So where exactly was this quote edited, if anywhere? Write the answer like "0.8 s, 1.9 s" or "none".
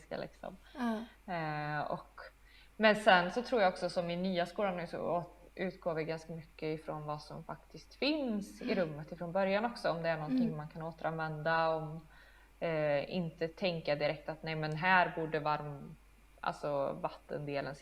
none